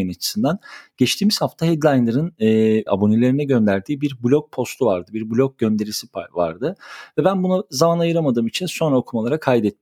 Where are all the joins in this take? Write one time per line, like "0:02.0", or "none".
0:02.9

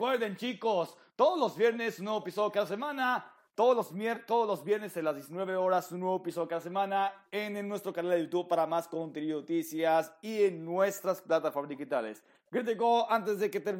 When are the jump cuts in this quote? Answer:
none

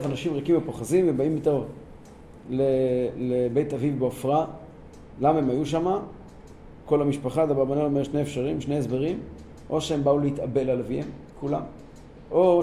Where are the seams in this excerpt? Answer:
0:11.3

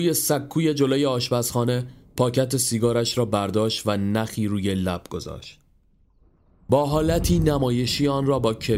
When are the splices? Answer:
none

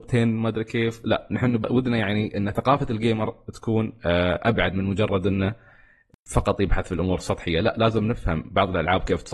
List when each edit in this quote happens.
0:01.6

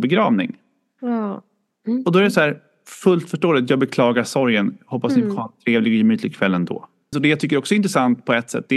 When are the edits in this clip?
0:07.1

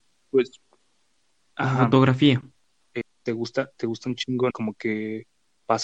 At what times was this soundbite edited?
0:02.8
0:04.5

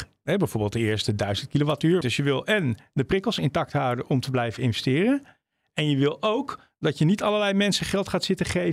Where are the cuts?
0:02.0

